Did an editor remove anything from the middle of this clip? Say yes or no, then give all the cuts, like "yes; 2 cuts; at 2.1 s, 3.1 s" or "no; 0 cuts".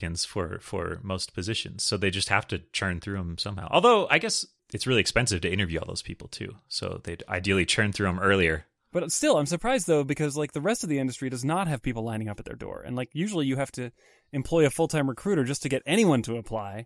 no; 0 cuts